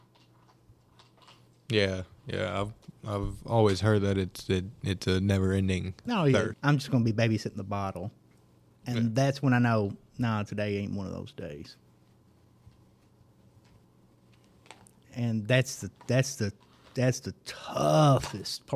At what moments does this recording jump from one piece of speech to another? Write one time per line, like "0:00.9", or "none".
0:06.5